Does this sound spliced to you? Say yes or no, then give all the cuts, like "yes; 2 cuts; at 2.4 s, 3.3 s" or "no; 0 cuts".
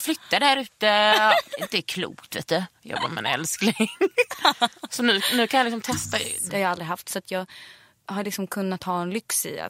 yes; 1 cut; at 6.5 s